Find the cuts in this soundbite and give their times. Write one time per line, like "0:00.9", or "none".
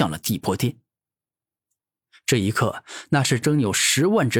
0:03.4